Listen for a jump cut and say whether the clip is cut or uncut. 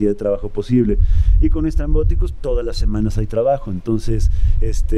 uncut